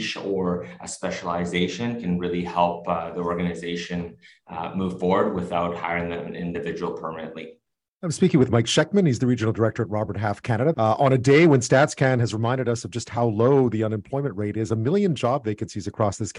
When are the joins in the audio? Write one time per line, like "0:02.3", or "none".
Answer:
0:10.7